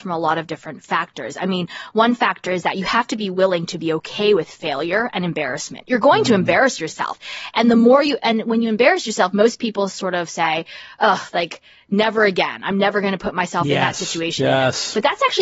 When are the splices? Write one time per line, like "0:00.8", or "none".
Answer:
none